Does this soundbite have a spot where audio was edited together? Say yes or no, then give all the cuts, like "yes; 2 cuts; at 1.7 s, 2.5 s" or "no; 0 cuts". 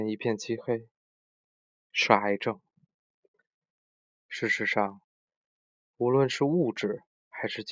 yes; 1 cut; at 4.1 s